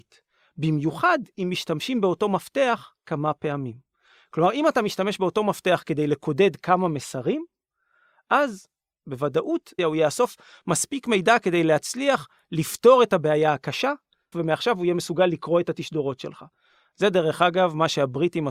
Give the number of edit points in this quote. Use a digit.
2